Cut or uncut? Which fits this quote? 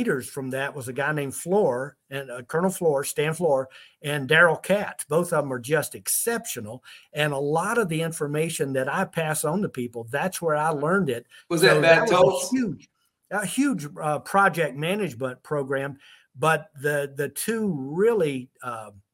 cut